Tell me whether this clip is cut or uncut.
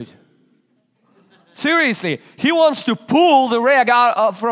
uncut